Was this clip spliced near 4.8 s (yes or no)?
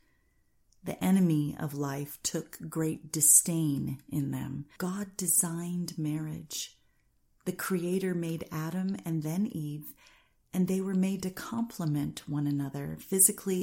yes